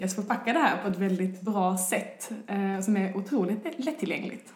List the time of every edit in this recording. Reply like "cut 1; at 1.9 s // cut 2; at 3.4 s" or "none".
none